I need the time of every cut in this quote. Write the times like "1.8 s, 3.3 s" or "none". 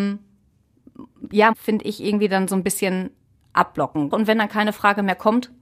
1.5 s, 4.1 s